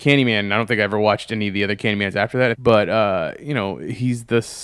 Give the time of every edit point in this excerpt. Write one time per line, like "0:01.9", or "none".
0:02.5